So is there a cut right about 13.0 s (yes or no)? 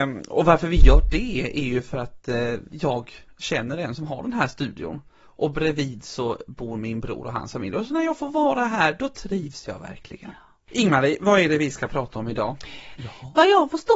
yes